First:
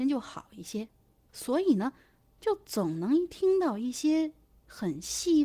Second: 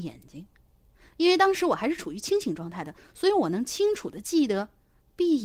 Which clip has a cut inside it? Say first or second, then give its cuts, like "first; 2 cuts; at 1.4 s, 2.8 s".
first; 1 cut; at 1.3 s